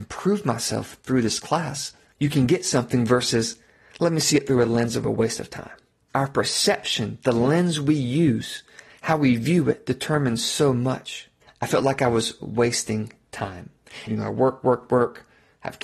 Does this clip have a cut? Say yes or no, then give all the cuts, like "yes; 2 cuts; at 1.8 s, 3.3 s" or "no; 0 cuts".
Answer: yes; 2 cuts; at 11.4 s, 14.1 s